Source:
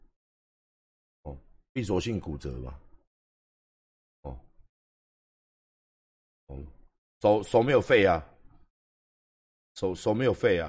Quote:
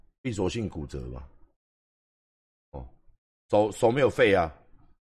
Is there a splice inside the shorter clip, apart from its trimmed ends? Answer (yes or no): yes